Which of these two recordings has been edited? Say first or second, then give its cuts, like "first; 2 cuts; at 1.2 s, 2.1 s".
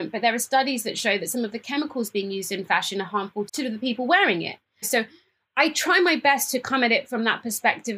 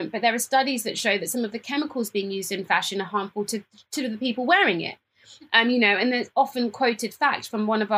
first; 2 cuts; at 3.5 s, 4.8 s